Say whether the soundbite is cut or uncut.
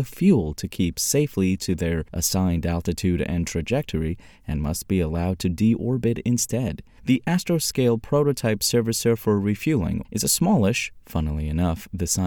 cut